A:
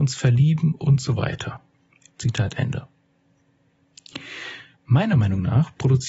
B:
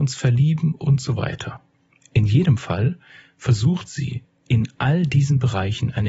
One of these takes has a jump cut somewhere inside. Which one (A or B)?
A